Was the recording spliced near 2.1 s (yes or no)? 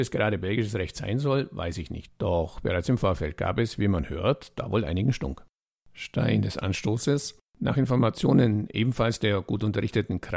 yes